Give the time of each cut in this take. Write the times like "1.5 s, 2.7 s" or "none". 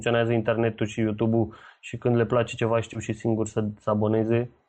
none